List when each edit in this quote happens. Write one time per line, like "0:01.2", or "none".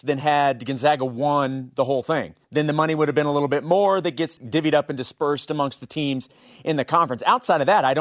0:02.4
0:04.4